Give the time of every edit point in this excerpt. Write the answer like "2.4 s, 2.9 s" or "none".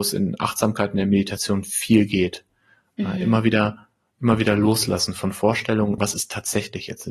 6.0 s